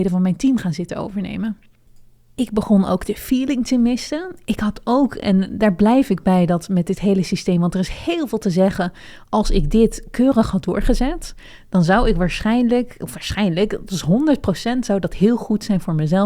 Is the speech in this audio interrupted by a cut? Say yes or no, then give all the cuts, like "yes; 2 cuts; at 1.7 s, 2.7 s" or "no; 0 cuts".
no; 0 cuts